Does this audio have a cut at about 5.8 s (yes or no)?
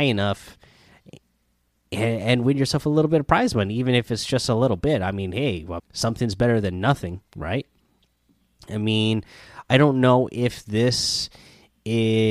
yes